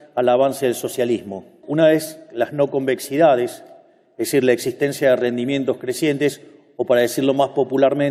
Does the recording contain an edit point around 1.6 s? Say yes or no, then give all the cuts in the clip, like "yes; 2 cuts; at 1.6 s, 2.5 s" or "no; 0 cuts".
yes; 1 cut; at 1.6 s